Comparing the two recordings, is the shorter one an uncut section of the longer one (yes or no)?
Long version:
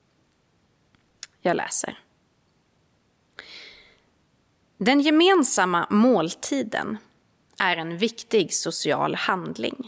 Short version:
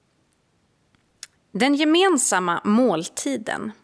no